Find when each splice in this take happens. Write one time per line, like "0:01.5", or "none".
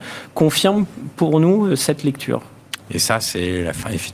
0:02.8